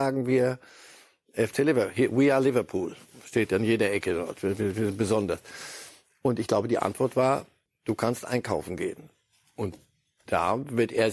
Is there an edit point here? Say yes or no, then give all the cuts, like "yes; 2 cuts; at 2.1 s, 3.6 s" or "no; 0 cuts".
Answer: no; 0 cuts